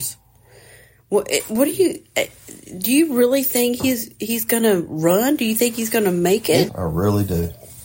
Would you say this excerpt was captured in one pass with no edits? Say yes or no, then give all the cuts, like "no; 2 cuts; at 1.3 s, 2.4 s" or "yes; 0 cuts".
no; 1 cut; at 6.7 s